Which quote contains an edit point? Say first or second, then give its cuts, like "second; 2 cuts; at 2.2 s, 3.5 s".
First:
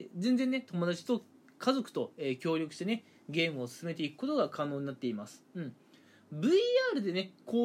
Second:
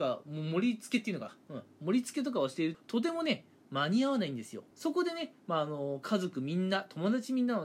second; 2 cuts; at 2.7 s, 4.7 s